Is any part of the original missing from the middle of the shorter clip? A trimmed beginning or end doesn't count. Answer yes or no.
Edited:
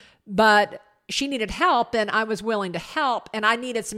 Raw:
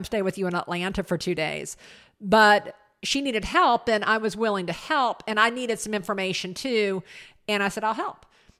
no